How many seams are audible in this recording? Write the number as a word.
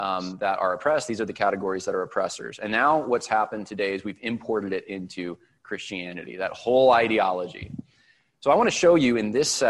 zero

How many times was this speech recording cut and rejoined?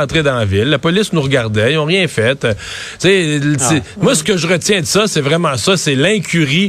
zero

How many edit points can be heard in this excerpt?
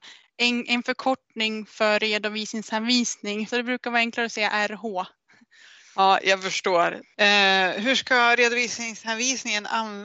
two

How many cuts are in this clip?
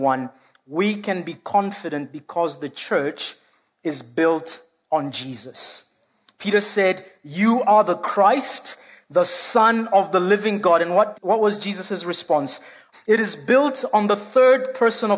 two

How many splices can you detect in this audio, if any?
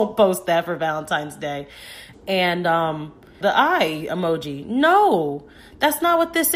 two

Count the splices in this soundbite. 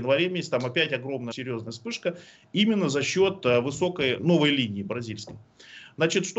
two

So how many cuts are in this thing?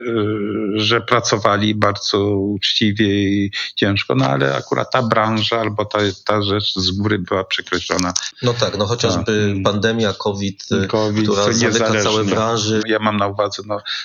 one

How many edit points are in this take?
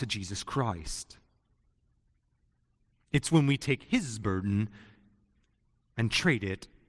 zero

